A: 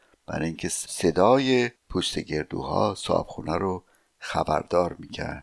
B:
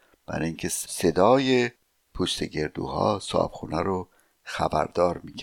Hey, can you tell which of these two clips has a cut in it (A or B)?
A